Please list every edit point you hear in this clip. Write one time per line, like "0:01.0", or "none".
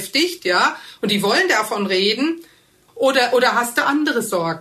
0:02.9

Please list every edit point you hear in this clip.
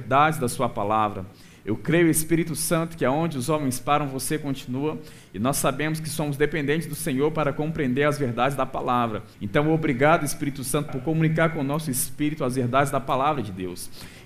0:09.3
0:10.9

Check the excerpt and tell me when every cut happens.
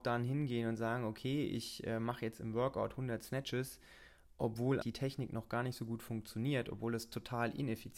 0:04.8

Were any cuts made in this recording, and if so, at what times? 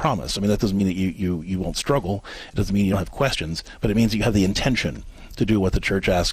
none

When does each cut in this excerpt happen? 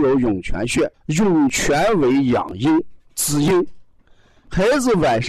0:00.9

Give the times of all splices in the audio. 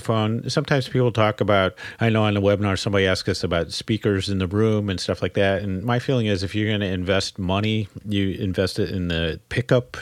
none

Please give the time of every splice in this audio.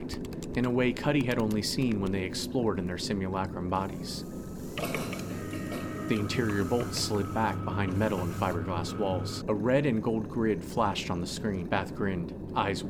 0:09.4
0:11.7

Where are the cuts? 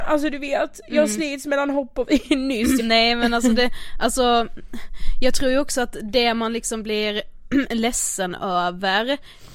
0:02.8

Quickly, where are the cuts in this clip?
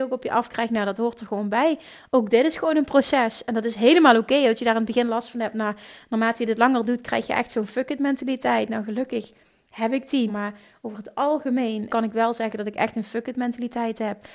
0:10.3
0:11.9

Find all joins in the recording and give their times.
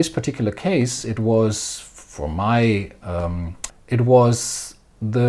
0:03.7

